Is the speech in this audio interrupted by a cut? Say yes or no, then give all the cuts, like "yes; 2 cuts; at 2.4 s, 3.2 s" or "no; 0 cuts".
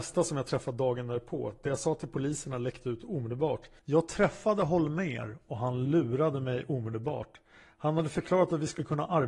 yes; 1 cut; at 3.8 s